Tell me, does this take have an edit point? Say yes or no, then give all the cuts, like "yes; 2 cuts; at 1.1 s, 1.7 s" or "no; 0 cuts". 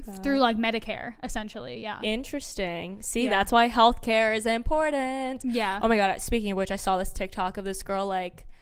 no; 0 cuts